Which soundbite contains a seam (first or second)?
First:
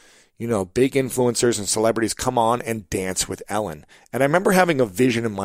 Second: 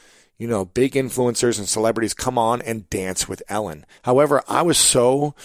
second